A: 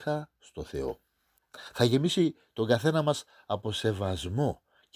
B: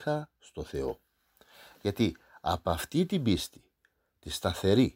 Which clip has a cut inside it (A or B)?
A